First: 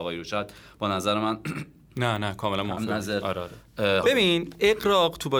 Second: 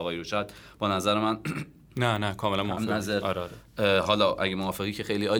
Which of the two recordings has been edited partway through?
first; 1 cut; at 4.0 s

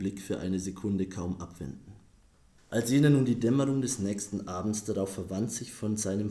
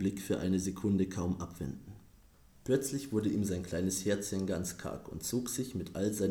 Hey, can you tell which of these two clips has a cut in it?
first; 1 cut; at 2.6 s

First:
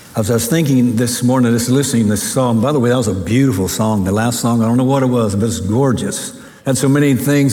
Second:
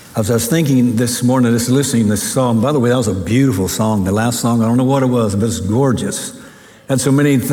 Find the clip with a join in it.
first; 1 cut; at 6.6 s

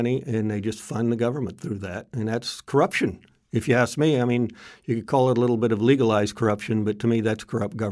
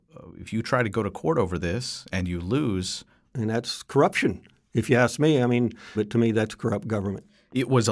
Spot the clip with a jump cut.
second; 2 cuts; at 3.3 s, 5.9 s

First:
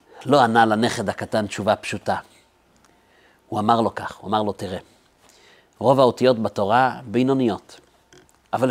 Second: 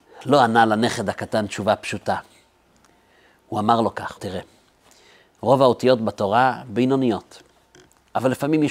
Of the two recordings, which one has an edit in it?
second; 1 cut; at 4.2 s

